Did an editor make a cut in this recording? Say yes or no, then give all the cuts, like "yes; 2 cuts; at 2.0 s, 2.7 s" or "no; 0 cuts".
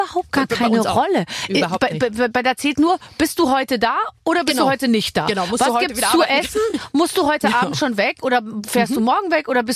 no; 0 cuts